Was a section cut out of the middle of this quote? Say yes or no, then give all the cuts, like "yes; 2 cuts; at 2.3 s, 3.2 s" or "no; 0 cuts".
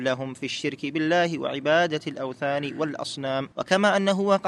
yes; 1 cut; at 3.5 s